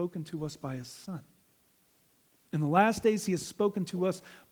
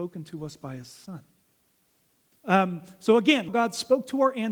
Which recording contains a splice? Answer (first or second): second